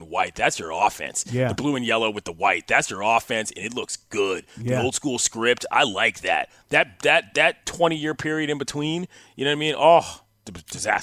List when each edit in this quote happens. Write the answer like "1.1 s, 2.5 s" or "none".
7.3 s